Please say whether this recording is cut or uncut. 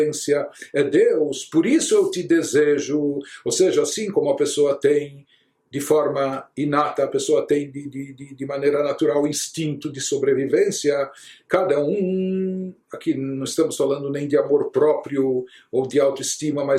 uncut